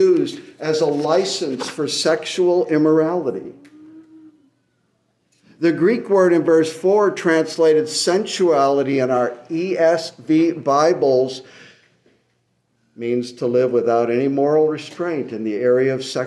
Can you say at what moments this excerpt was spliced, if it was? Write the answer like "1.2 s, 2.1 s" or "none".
none